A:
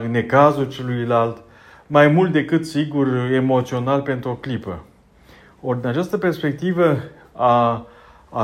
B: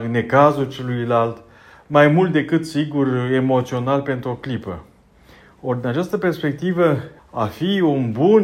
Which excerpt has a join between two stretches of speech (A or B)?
B